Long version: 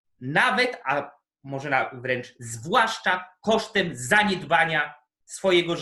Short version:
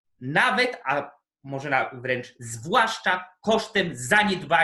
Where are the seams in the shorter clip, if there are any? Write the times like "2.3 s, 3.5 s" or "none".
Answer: none